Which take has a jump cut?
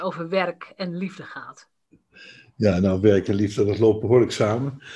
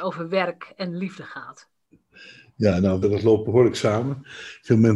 second; 1 cut; at 3.0 s

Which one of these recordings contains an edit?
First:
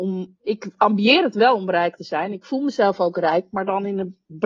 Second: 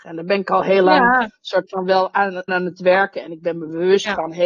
second; 1 cut; at 2.5 s

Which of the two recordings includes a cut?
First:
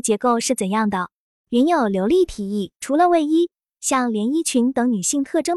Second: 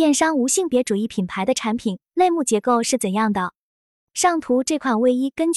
first; 2 cuts; at 1.3 s, 2.8 s

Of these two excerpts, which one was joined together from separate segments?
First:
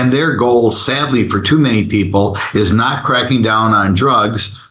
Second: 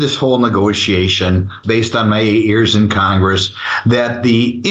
second; 1 cut; at 1.6 s

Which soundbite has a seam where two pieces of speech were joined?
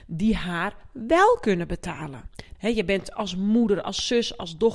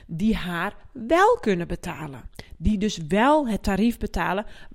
first; 1 cut; at 2.6 s

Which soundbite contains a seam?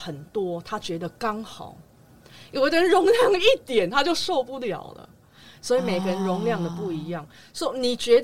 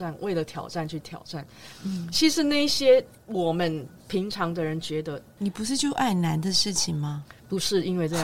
second; 2 cuts; at 4.0 s, 5.4 s

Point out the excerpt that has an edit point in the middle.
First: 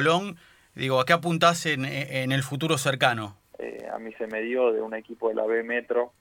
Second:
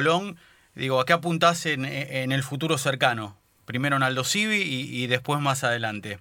first; 1 cut; at 3.5 s

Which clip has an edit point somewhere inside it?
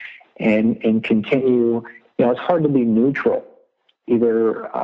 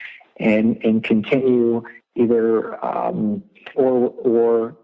second; 2 cuts; at 2.0 s, 3.7 s

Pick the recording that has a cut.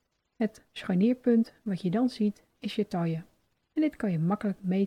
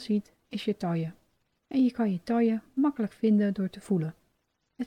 second; 1 cut; at 1.6 s

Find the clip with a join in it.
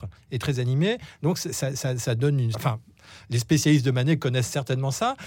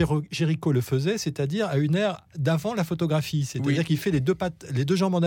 first; 1 cut; at 2.5 s

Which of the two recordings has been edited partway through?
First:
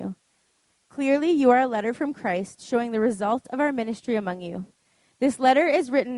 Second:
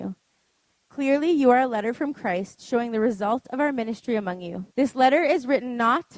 second; 1 cut; at 4.7 s

